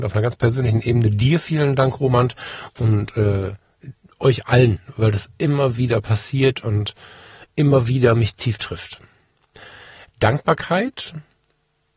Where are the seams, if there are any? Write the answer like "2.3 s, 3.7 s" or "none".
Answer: none